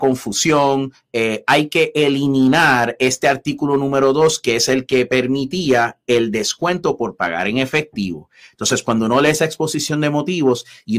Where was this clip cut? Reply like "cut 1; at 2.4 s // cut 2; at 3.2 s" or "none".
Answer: none